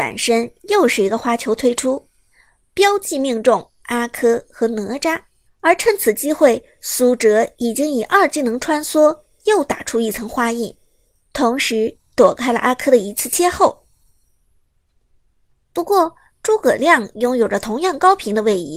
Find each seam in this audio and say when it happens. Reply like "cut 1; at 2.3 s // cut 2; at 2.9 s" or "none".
cut 1; at 5.5 s